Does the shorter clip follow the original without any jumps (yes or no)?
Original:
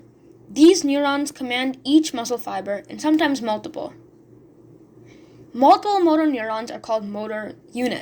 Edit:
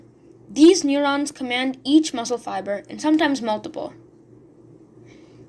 yes